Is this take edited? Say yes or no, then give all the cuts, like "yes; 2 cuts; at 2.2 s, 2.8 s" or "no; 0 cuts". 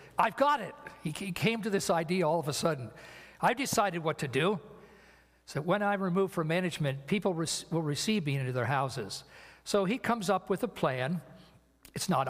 no; 0 cuts